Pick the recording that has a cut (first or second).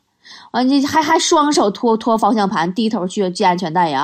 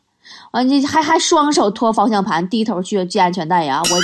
second